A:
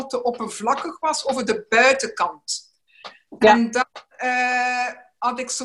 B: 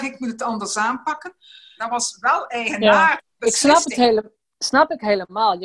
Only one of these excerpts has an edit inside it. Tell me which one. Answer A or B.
B